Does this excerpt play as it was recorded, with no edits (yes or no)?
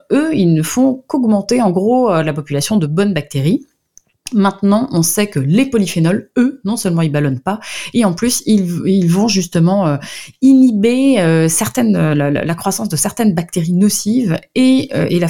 yes